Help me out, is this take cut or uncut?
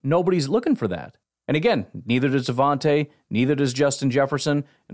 uncut